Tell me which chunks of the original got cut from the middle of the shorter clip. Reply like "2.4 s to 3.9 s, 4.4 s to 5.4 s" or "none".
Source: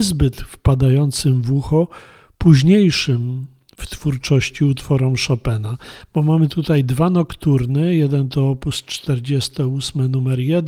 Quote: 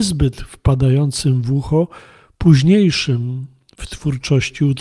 none

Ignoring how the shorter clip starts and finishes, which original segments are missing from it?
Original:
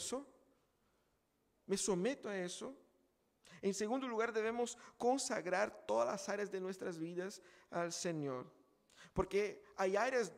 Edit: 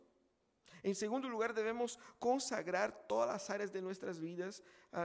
none

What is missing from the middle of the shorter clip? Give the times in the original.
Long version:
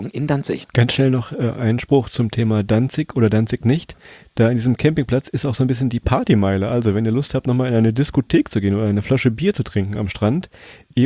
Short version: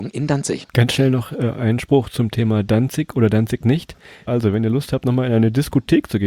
4.3 s to 6.7 s

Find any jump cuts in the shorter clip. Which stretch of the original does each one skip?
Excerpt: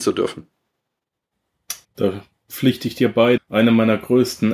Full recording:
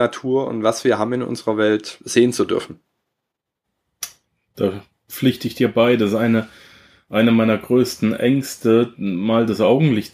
4.2 s to 4.4 s, 6.0 s to 7.0 s

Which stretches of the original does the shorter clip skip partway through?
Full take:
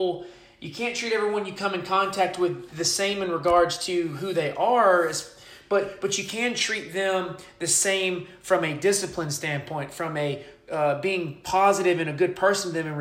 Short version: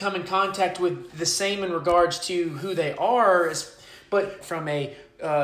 6.0 s to 9.9 s

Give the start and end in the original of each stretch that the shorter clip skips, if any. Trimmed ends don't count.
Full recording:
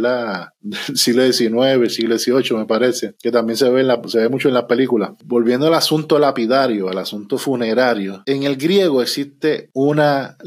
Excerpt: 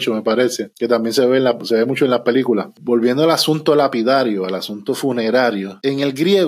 none

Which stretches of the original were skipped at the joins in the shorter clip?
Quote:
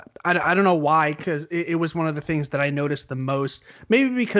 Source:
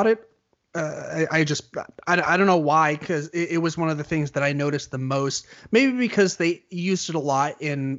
none

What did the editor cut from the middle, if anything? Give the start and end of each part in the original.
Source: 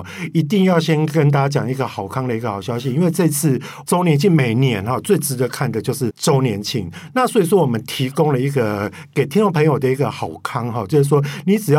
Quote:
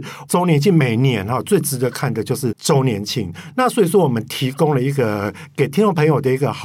none

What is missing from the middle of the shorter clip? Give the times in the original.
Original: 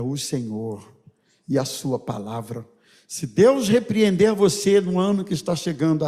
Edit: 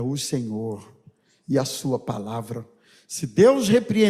none

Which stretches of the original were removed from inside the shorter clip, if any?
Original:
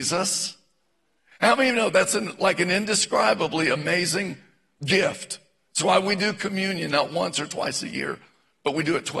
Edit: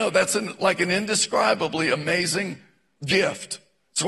none

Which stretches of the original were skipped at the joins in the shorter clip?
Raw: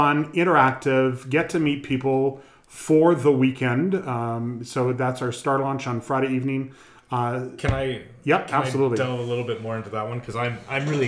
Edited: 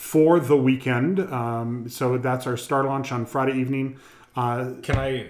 none

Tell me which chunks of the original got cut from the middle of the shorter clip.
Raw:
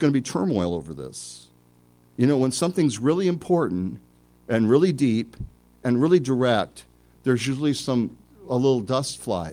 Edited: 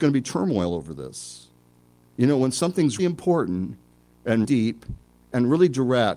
3.0 s to 3.2 s, 4.7 s to 4.9 s

